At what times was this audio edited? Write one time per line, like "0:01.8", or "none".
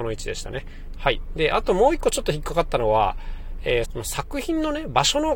0:00.9
0:03.8